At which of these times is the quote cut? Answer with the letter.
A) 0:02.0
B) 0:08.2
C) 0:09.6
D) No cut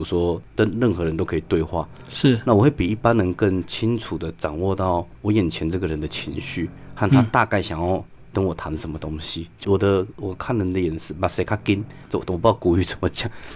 C